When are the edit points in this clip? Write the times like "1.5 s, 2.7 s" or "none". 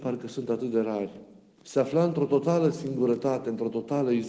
1.6 s